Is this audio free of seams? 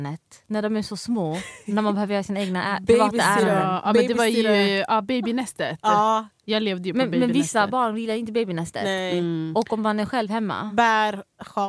yes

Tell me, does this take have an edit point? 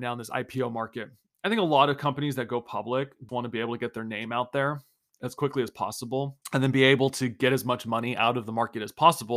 yes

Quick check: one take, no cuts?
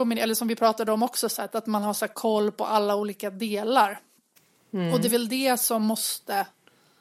no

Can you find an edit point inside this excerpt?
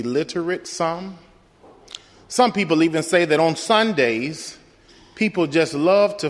no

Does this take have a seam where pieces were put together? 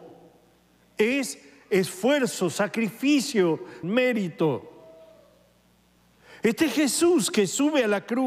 yes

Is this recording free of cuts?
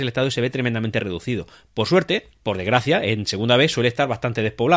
no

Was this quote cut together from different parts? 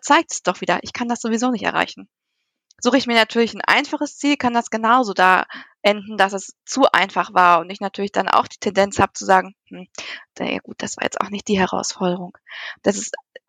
no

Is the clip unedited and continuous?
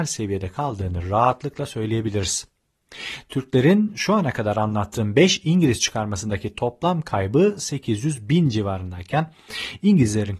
yes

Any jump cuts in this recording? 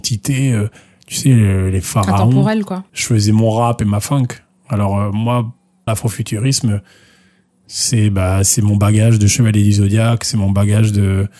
yes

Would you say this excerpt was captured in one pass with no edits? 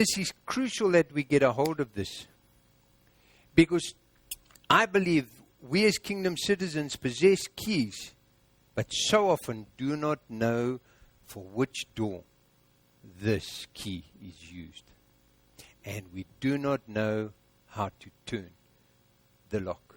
yes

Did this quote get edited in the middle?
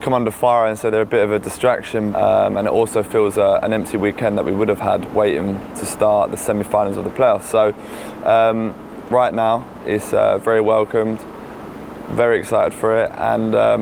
yes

